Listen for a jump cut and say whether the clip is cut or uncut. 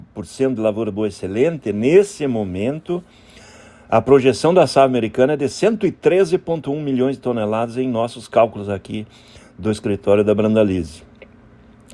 uncut